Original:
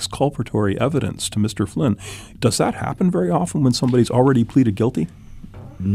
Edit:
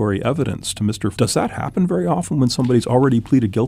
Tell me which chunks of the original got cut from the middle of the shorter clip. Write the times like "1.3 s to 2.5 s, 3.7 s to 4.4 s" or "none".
1.7 s to 2.4 s